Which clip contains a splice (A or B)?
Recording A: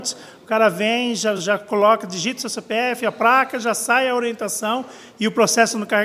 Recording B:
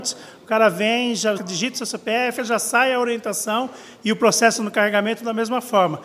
B